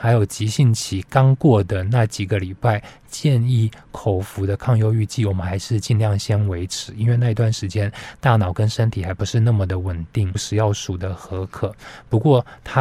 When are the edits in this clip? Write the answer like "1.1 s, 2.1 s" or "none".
10.3 s